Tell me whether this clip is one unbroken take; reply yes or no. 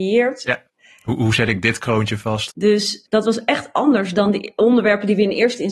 no